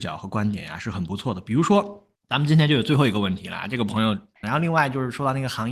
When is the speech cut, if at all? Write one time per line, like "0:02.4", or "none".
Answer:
0:02.2
0:04.4